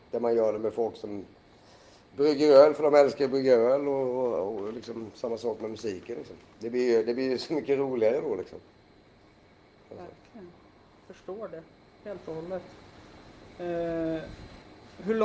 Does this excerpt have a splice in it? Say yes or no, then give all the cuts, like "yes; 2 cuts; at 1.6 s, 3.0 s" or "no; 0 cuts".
no; 0 cuts